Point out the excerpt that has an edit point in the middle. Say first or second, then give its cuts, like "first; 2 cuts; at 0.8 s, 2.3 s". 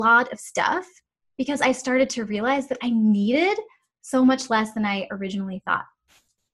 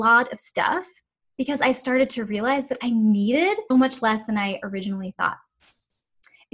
second; 1 cut; at 3.7 s